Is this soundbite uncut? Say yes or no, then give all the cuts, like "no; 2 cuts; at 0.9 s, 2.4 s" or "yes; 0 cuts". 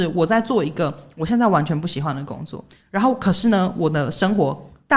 yes; 0 cuts